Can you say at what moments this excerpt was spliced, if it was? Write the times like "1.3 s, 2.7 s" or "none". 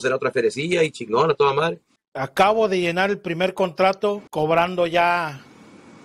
2.0 s, 4.3 s